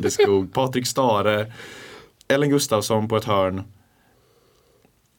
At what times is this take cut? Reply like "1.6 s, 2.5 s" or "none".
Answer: 2.2 s

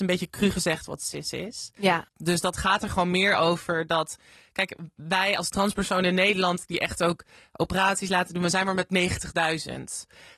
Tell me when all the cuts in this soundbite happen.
2.1 s

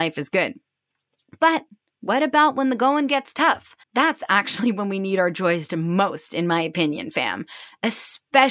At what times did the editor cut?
3.8 s

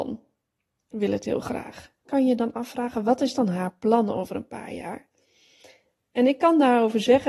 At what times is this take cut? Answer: 2.0 s

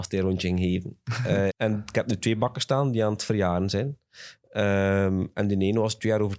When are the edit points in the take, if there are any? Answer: 1.5 s

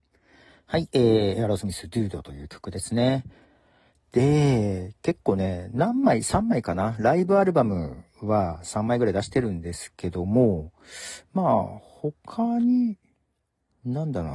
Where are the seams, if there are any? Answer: none

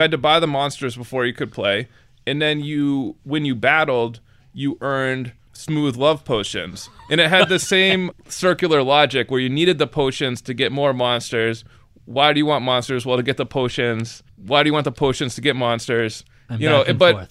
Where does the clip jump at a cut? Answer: none

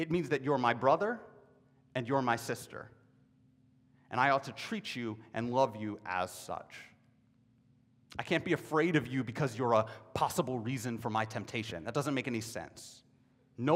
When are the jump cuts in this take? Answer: none

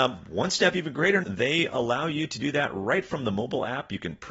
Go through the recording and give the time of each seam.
1.2 s

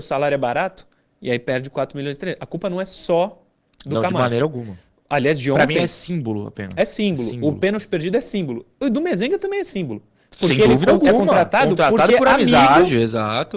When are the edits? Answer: none

